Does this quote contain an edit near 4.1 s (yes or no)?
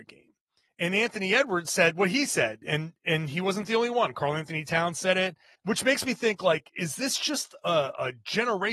no